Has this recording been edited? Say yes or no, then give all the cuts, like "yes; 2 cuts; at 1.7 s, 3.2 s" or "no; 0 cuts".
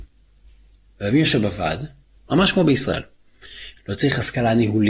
yes; 2 cuts; at 2.2 s, 3.8 s